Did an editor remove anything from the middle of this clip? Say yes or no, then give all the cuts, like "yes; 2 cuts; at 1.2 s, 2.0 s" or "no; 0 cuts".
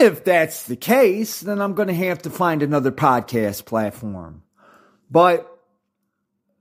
no; 0 cuts